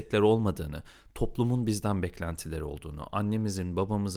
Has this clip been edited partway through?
no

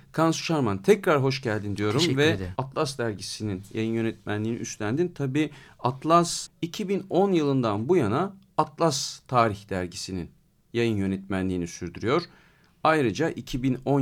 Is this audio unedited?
no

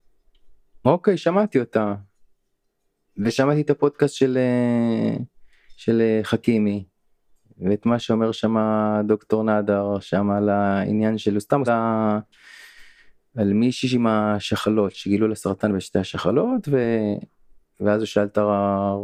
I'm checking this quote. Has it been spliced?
yes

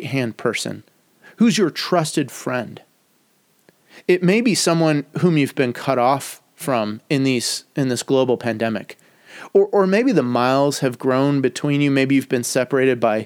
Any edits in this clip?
no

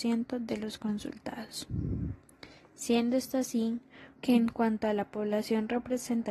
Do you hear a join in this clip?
yes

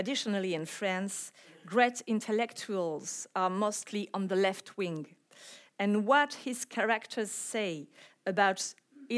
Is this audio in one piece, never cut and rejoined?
yes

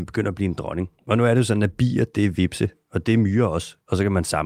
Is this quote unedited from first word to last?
yes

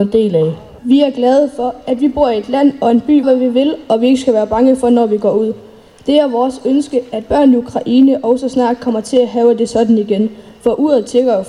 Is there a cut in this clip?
yes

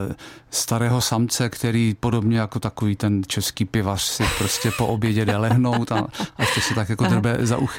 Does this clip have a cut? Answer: no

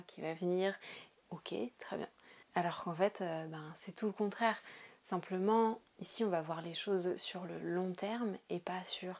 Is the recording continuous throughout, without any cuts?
no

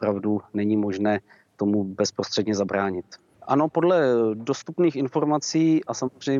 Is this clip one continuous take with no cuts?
no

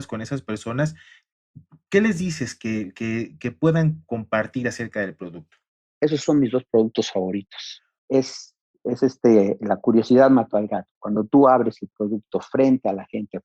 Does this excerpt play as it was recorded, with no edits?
no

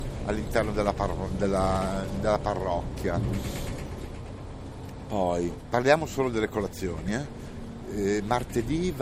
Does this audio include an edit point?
no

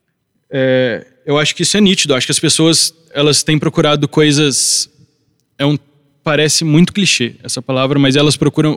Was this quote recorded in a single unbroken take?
yes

